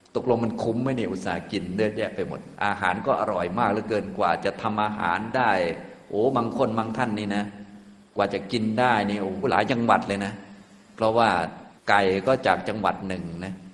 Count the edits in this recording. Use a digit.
2